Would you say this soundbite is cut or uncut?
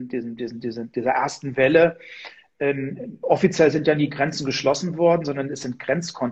uncut